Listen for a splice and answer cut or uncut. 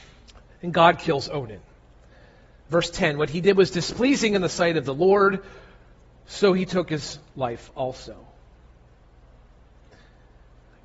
uncut